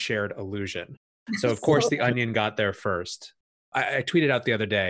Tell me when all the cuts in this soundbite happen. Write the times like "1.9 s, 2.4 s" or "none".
none